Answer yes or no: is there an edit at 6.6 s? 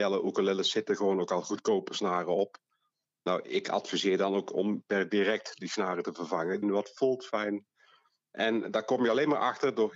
yes